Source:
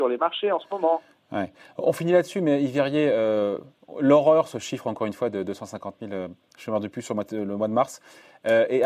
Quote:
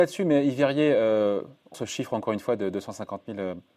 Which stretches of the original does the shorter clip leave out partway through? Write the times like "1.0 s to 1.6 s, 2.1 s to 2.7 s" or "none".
3.9 s to 4.5 s

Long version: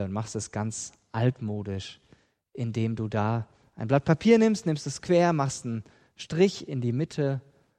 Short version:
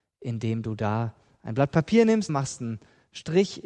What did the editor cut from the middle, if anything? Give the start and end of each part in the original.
4.6 s to 5.3 s

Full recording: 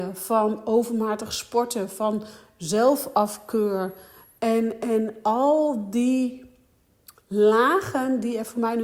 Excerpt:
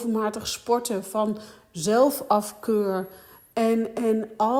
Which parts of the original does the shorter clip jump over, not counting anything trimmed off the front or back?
none

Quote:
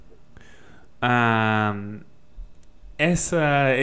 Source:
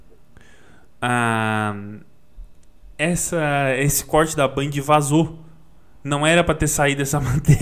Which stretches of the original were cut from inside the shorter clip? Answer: none

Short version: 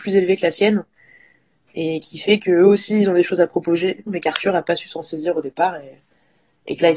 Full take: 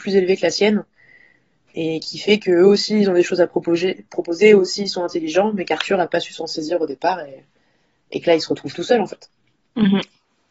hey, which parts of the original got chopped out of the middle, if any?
4.1 s to 5.5 s

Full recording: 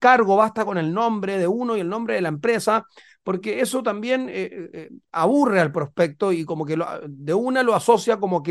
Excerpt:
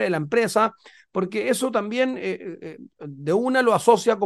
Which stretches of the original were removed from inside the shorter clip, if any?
5.1 s to 7.0 s

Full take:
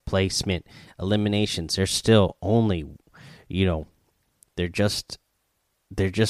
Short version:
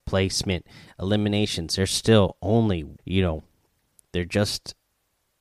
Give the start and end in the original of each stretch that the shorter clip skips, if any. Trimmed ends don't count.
3.0 s to 3.4 s

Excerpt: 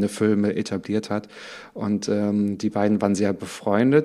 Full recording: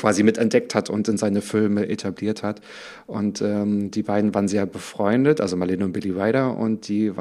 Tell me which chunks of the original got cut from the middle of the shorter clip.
none

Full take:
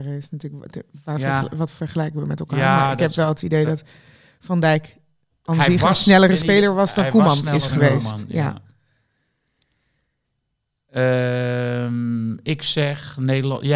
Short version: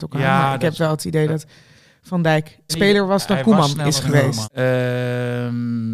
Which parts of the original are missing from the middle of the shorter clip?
5.1 s to 6.4 s, 8.1 s to 10.8 s

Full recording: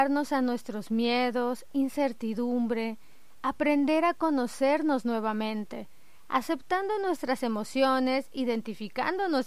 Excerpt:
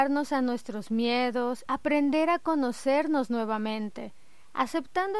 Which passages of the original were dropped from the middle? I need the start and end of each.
1.7 s to 3.4 s

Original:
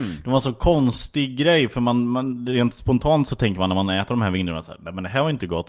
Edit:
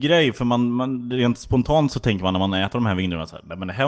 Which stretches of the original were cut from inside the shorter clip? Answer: none

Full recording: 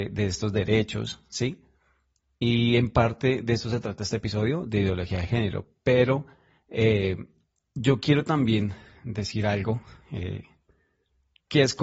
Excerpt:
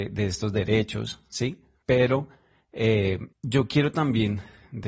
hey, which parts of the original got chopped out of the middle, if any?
1.8 s to 5.8 s, 7.3 s to 7.6 s

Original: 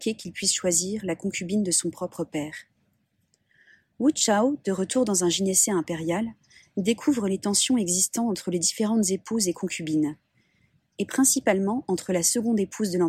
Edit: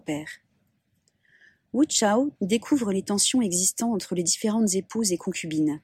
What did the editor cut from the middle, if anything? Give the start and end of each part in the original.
4.6 s to 6.7 s

